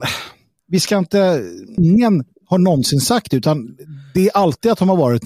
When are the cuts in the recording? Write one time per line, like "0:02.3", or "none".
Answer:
0:01.8

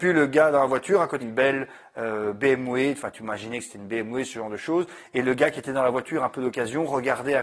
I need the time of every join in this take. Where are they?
0:01.2

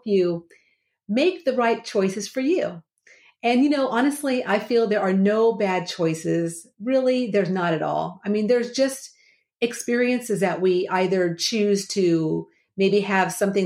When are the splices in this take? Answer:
none

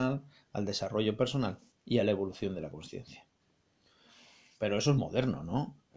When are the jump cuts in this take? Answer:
0:05.0

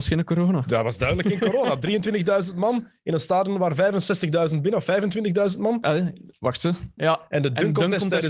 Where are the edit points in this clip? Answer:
0:05.8
0:07.0

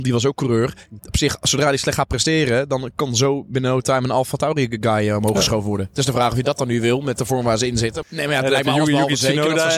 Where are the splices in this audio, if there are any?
0:01.0
0:08.0

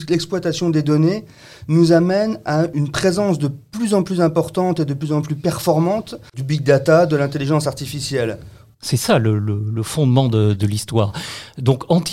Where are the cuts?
0:08.7
0:10.5

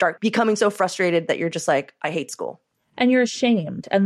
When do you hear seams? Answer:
none

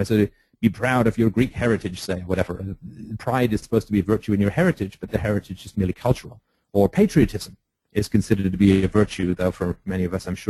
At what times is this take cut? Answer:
0:03.6

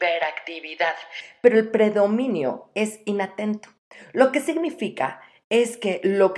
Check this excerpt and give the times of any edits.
none

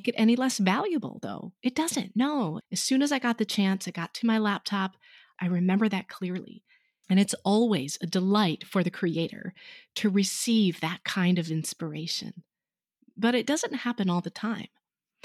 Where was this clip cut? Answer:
0:02.6
0:05.4
0:07.0

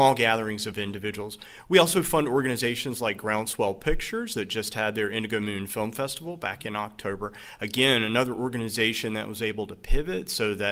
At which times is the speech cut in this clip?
none

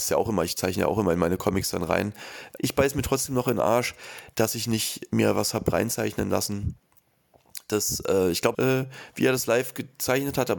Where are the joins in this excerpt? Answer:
0:02.6
0:08.5

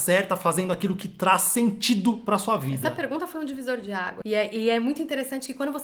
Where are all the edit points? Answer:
0:04.2

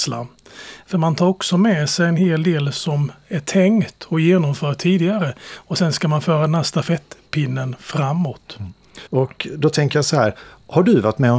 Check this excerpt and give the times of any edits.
0:09.1

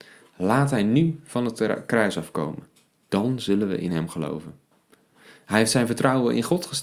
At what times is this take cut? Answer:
none

